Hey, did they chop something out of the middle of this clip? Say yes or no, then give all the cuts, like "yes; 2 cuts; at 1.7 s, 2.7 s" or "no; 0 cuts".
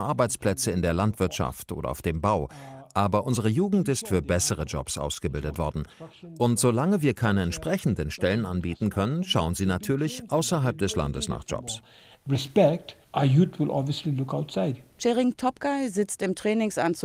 no; 0 cuts